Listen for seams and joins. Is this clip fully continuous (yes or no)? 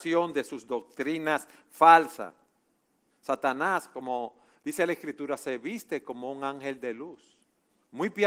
no